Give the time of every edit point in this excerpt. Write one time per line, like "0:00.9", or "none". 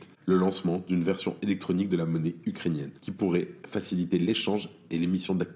0:03.0